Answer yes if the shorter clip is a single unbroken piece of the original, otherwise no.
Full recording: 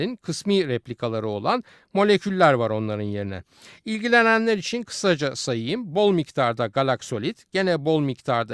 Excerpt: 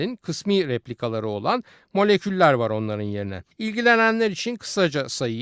no